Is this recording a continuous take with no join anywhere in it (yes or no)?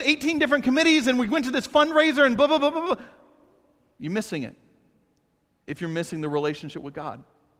yes